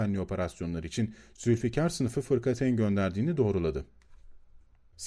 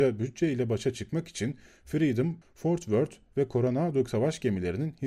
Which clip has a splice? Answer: second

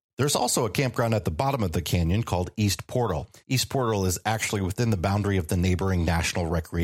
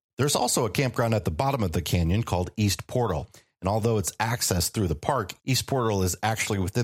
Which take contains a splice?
first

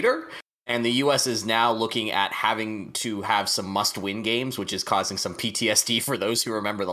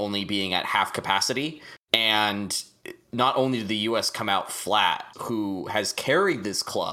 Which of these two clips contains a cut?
second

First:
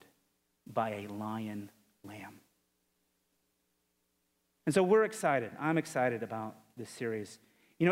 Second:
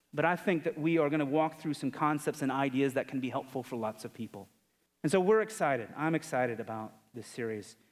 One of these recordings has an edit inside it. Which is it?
second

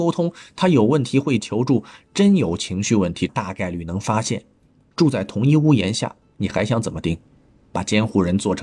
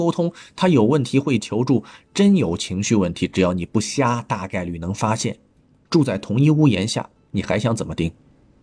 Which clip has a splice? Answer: first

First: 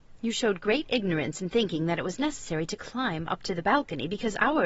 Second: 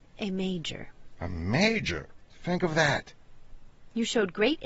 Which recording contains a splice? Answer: second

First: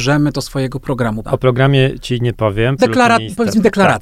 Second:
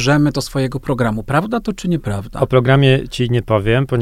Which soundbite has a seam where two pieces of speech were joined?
first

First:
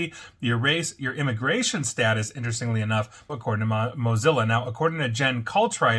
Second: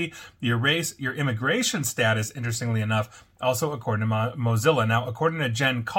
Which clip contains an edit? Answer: first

